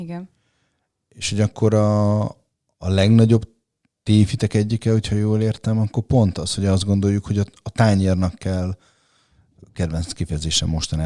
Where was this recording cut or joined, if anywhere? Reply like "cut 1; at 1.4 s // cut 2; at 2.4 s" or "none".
none